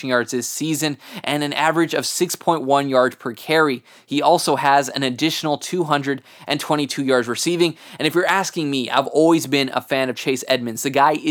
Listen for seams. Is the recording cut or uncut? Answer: uncut